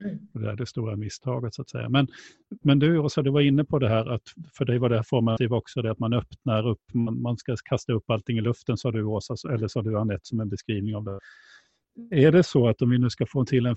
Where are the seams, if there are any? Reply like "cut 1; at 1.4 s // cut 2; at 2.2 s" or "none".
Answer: none

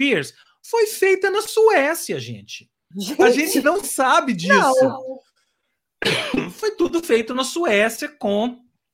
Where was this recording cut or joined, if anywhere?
cut 1; at 2.9 s

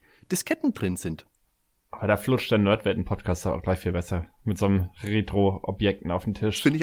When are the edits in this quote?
none

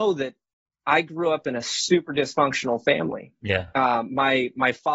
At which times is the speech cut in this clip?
none

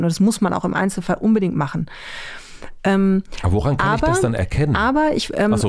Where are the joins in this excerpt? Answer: none

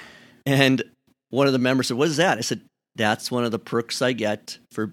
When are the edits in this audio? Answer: none

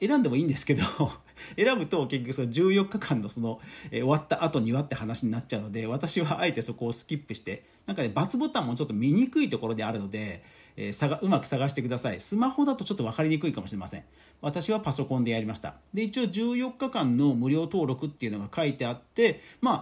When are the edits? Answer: cut 1; at 15.9 s

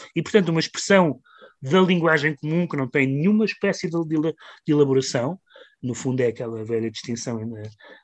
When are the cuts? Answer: none

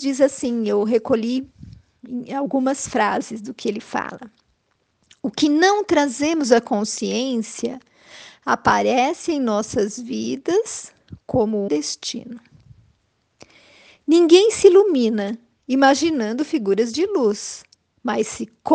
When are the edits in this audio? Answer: cut 1; at 11.7 s

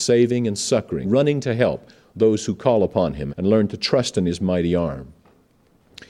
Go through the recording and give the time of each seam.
cut 1; at 1.0 s // cut 2; at 3.3 s

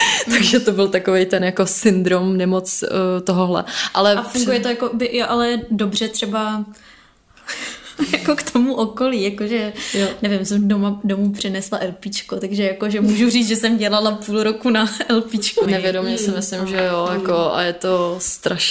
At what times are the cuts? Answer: cut 1; at 15.7 s

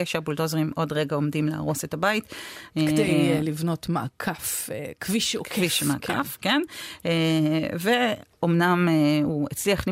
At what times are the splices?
none

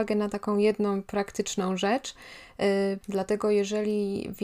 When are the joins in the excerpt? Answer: cut 1; at 3.0 s

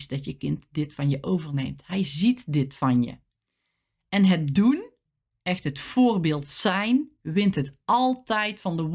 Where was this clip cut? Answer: none

